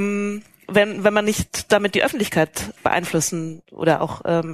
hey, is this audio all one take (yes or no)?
no